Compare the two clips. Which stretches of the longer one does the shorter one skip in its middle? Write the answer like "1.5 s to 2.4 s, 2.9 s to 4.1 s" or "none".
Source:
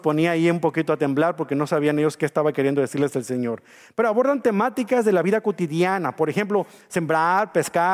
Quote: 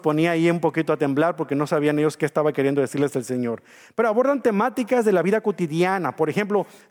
none